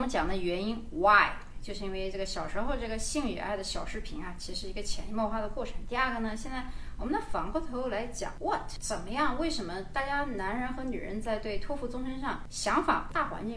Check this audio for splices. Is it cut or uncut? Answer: uncut